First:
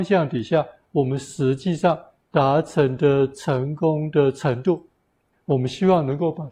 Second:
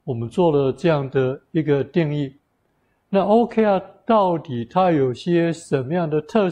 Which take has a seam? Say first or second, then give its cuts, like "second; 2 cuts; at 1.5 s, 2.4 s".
first; 1 cut; at 5.3 s